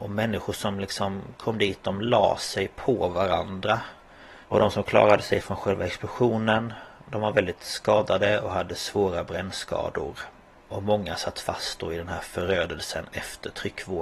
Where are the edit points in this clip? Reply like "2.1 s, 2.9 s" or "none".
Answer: 4.4 s